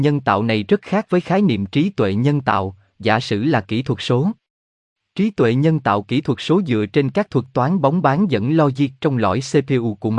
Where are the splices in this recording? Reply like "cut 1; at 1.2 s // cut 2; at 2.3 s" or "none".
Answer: none